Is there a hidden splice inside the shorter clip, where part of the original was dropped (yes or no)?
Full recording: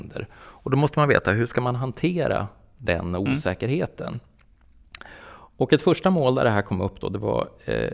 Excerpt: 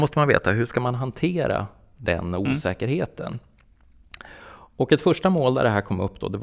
no